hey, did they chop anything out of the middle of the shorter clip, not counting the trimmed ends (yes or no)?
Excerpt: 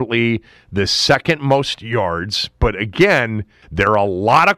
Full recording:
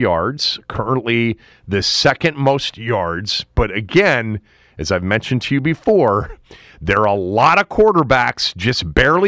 yes